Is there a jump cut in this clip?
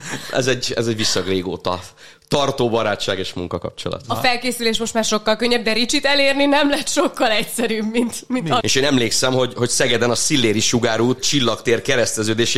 yes; 2 cuts; at 8.6 s, 11.2 s

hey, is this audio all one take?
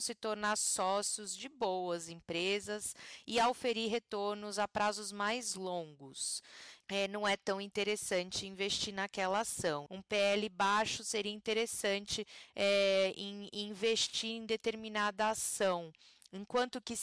no; 2 cuts; at 6.8 s, 9.9 s

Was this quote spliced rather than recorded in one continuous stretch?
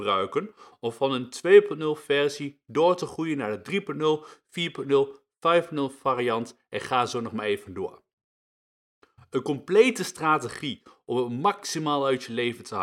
no; 0 cuts

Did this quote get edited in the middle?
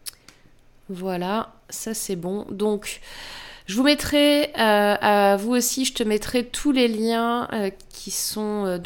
no; 0 cuts

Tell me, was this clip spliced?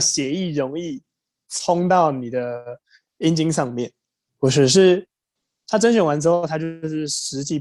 yes; 1 cut; at 4.3 s

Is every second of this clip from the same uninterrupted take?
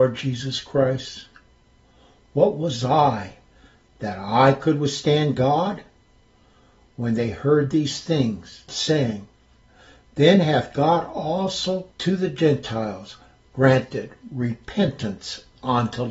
no; 2 cuts; at 8.7 s, 11.9 s

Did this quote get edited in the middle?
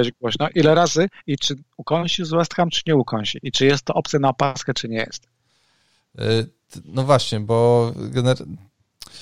no; 0 cuts

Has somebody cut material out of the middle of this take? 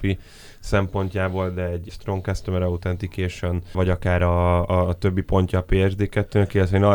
no; 0 cuts

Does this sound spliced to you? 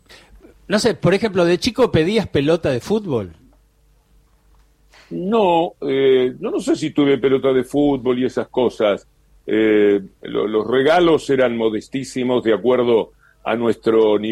no; 0 cuts

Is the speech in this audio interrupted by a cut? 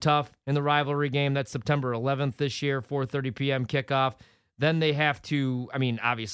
no; 0 cuts

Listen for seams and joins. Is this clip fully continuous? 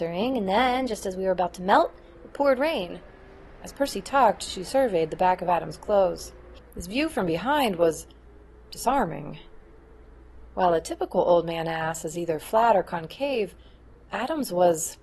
no; 1 cut; at 6.6 s

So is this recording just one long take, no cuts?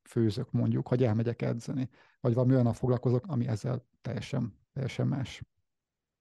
no; 2 cuts; at 3.2 s, 4.6 s

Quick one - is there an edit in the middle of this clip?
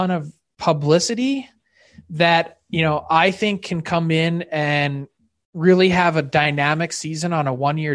no; 0 cuts

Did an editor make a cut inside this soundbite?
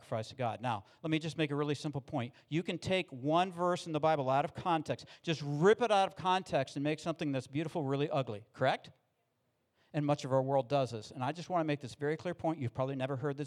no; 0 cuts

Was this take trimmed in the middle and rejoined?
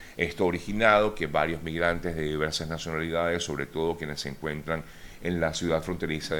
no; 0 cuts

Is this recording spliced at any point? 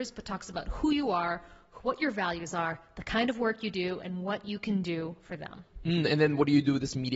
no; 0 cuts

